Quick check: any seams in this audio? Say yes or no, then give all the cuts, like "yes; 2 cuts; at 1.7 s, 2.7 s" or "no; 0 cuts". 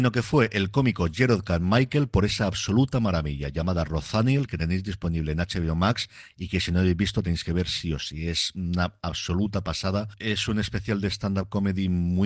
no; 0 cuts